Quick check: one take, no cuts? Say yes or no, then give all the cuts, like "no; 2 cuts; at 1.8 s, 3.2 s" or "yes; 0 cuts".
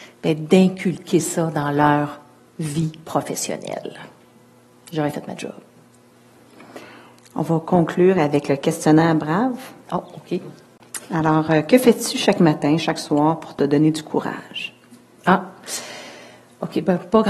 yes; 0 cuts